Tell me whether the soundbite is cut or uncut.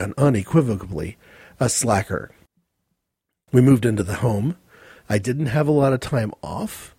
uncut